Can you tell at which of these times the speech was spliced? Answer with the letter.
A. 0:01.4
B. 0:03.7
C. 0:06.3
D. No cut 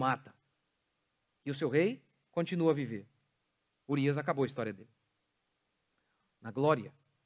C